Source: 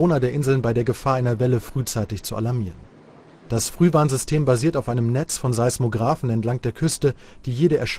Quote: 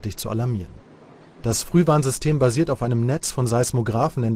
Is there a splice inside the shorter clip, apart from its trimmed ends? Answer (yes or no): no